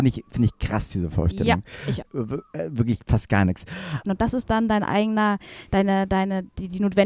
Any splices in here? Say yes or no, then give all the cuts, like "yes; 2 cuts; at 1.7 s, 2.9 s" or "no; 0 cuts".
yes; 2 cuts; at 2.0 s, 4.0 s